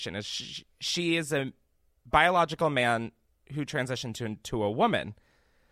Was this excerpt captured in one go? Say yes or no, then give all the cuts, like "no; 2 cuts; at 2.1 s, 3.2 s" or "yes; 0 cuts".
yes; 0 cuts